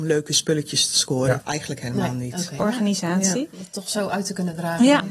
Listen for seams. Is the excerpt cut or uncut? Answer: cut